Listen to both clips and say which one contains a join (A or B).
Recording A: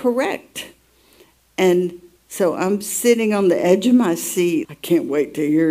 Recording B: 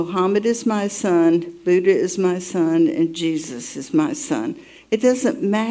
A